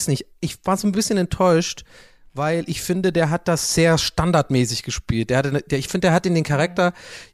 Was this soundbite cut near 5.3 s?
no; 0 cuts

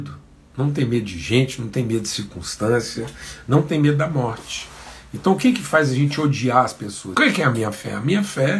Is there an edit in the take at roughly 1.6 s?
no; 1 cut; at 7.1 s

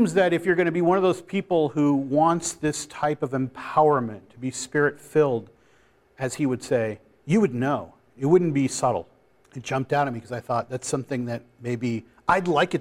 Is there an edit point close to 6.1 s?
no; 1 cut; at 9.4 s

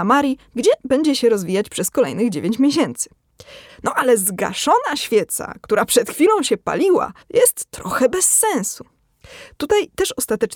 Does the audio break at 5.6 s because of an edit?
no; 2 cuts; at 3.7 s, 7.2 s

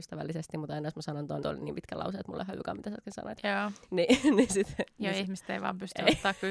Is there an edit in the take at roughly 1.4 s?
yes; 1 cut; at 1.4 s

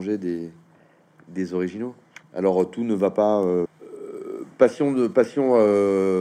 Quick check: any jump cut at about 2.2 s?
yes; 2 cuts; at 2.2 s, 3.6 s

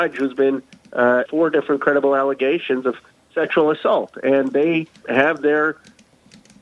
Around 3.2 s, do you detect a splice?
no; 2 cuts; at 1.3 s, 5.0 s

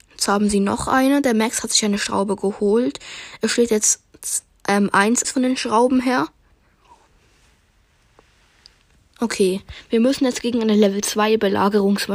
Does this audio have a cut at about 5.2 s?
yes; 1 cut; at 5.2 s

